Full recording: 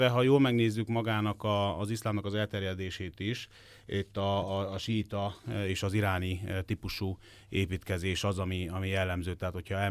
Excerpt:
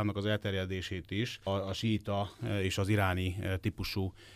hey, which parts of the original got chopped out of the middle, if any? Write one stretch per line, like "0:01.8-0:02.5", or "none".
0:03.6-0:04.5